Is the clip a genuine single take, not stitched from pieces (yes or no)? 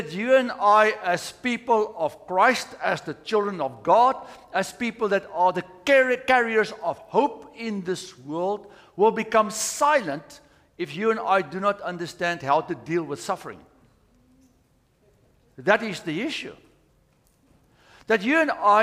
yes